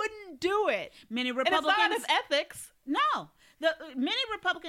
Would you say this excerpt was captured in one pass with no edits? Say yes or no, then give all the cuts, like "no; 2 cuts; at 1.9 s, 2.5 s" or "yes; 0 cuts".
yes; 0 cuts